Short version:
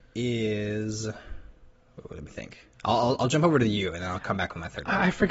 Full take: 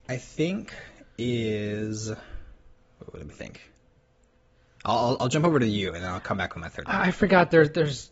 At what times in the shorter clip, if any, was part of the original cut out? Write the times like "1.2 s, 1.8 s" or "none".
2.7 s